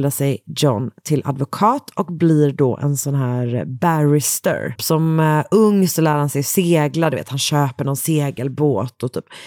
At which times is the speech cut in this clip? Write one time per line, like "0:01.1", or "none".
0:04.8